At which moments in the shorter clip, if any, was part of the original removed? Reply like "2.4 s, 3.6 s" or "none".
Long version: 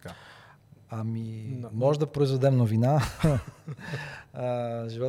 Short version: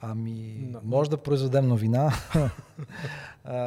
none